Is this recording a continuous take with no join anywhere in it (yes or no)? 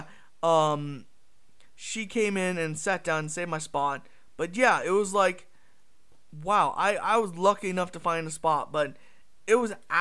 yes